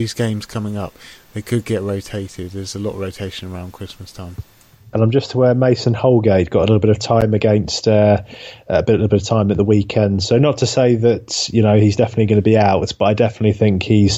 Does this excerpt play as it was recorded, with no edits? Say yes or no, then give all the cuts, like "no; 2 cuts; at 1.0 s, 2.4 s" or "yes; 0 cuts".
yes; 0 cuts